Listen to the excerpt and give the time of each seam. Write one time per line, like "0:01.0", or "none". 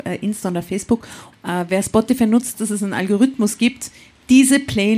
0:01.3
0:02.5